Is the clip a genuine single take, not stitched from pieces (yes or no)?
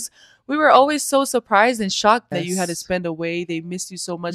no